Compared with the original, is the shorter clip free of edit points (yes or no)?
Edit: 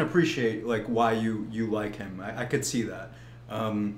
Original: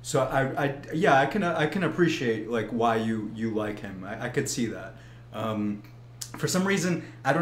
yes